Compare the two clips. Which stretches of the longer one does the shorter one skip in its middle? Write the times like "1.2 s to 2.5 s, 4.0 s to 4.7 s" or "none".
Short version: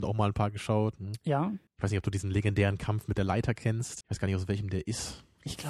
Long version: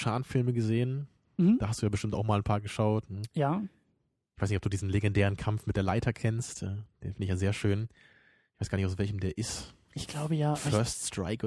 3.8 s to 4.3 s, 6.6 s to 8.5 s